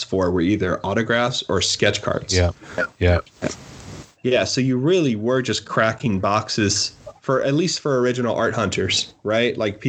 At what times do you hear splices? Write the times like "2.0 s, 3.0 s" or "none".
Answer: 4.2 s